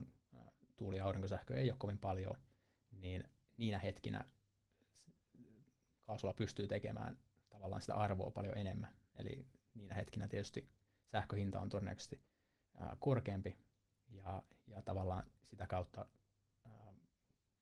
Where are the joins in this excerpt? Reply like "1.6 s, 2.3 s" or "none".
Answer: none